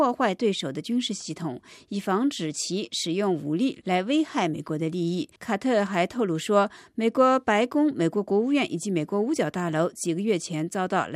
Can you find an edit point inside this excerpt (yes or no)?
yes